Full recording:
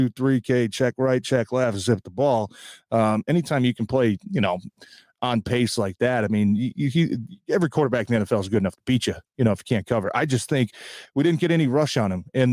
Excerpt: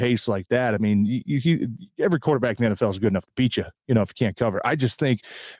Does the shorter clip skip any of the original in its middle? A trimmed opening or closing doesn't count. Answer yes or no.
no